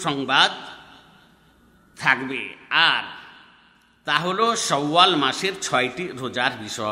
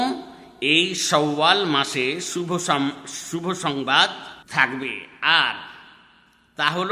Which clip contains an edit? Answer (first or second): second